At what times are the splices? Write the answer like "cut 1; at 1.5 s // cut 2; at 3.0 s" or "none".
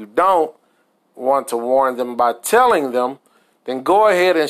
none